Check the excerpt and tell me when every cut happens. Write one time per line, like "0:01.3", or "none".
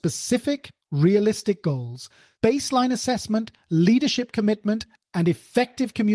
0:02.4